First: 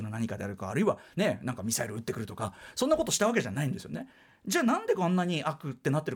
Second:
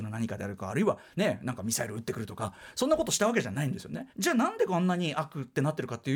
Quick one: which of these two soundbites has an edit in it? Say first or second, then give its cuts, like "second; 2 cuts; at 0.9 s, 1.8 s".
second; 1 cut; at 4.1 s